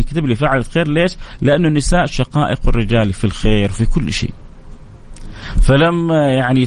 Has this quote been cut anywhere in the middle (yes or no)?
no